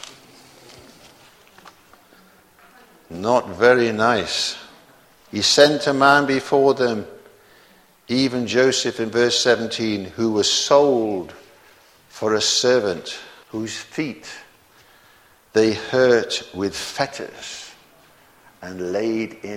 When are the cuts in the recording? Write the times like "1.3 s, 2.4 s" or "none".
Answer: 13.4 s